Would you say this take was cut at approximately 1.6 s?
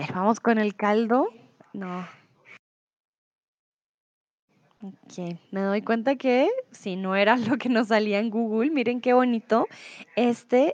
yes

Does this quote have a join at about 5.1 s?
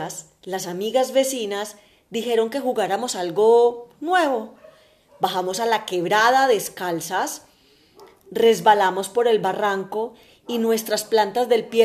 no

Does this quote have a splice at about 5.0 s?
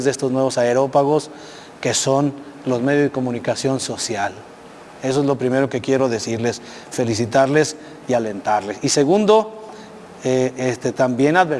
no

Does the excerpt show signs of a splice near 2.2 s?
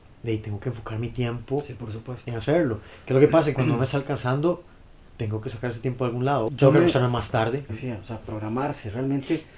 no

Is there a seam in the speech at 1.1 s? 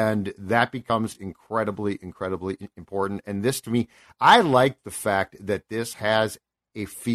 no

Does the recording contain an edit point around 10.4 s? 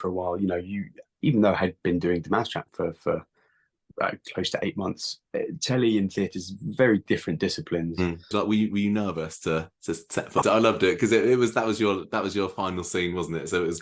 yes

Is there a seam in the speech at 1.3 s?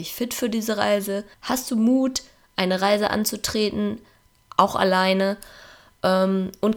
yes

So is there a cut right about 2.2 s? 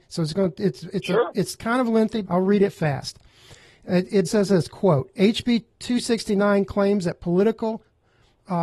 yes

